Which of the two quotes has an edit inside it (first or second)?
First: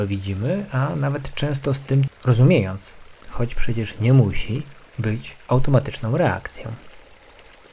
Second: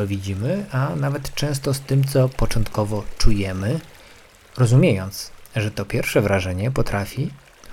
first